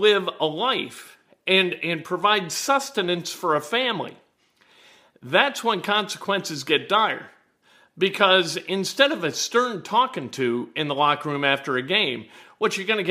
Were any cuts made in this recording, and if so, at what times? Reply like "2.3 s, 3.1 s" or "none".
none